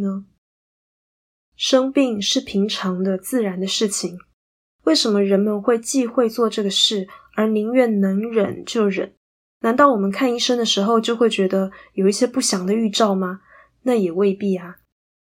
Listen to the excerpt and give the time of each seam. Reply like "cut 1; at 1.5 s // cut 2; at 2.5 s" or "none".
cut 1; at 4.6 s